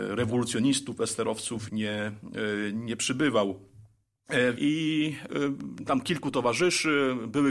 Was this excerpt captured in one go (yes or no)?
no